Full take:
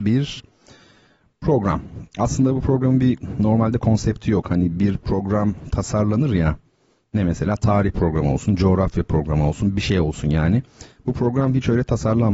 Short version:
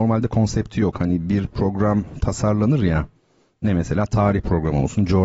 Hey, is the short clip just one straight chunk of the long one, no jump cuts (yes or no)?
yes